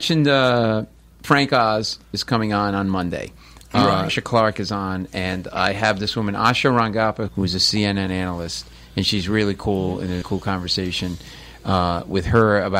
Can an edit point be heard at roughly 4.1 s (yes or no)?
yes